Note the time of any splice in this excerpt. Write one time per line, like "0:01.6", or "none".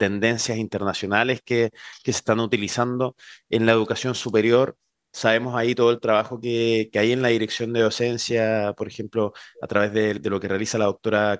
none